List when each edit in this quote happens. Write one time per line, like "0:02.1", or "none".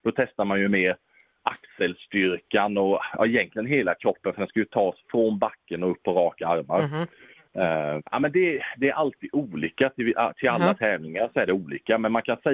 0:08.0